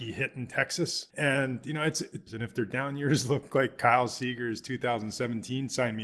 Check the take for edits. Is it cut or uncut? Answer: cut